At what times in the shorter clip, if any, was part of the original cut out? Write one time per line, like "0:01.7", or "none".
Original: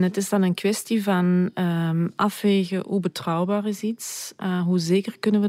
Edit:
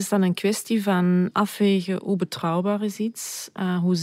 0:01.3